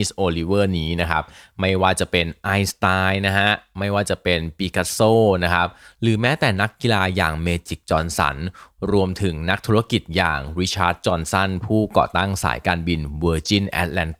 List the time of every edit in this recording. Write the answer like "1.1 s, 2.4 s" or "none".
none